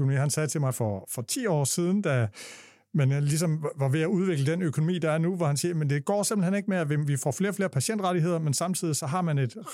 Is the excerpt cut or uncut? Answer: uncut